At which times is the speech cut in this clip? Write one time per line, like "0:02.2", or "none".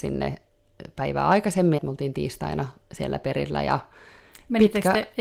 0:01.8